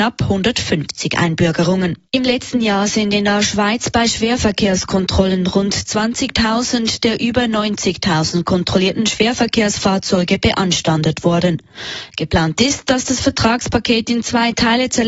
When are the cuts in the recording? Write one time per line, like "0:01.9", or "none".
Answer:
0:02.1
0:12.1